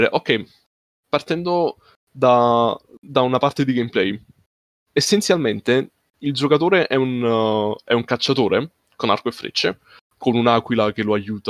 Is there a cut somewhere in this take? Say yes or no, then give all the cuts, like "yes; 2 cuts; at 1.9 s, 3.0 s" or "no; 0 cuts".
no; 0 cuts